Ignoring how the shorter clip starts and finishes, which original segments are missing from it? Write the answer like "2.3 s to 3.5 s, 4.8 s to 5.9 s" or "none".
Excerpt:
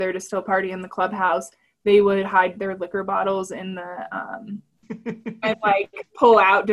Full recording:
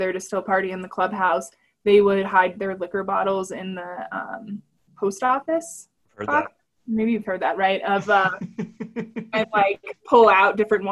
4.8 s to 8.7 s